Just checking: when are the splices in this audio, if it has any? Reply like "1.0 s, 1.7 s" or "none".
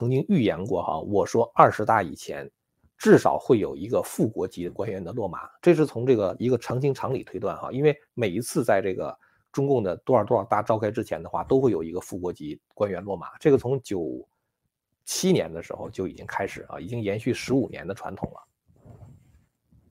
none